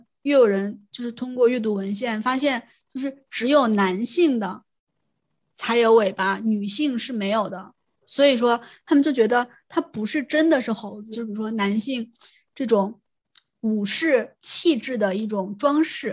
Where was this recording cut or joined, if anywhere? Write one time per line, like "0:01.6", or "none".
0:11.1